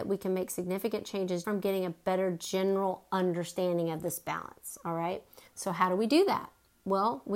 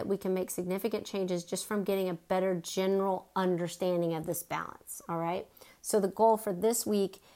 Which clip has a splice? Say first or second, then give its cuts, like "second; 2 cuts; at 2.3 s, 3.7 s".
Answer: first; 2 cuts; at 1.4 s, 5.5 s